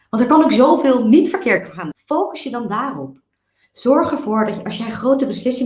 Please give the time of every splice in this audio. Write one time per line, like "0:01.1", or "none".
0:01.9